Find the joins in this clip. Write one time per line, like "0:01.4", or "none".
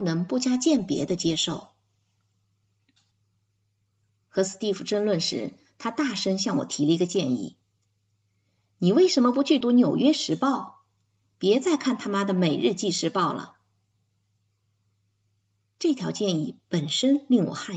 0:09.6